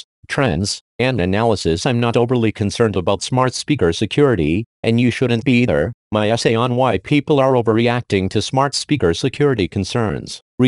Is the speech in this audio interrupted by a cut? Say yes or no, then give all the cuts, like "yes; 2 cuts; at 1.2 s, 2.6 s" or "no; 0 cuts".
no; 0 cuts